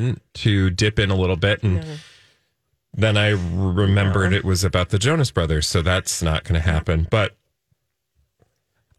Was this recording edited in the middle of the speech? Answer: no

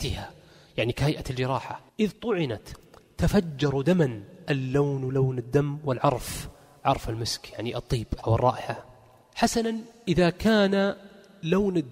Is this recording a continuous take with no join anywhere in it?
no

